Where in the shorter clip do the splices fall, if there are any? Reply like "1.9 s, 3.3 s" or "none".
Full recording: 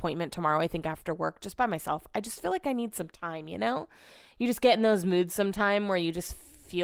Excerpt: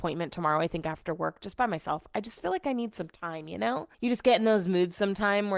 3.9 s